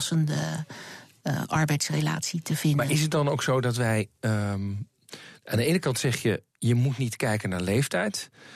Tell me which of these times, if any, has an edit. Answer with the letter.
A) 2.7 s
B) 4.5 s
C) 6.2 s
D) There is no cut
D